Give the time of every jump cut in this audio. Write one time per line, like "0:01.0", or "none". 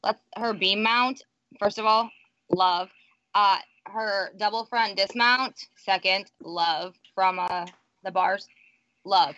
none